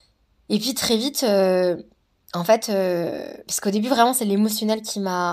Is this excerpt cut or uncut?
uncut